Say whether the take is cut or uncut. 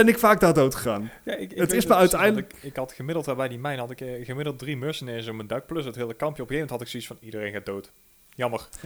uncut